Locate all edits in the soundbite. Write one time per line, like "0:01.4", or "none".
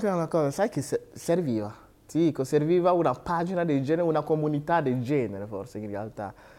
0:02.0